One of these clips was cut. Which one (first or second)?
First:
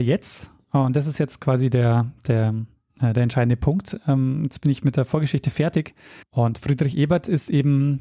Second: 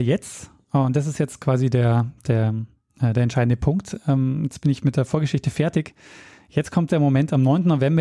first